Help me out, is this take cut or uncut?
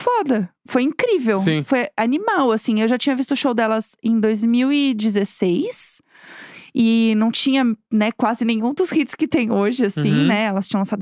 uncut